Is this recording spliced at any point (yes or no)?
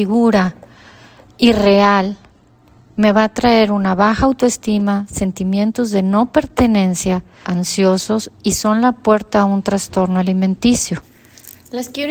yes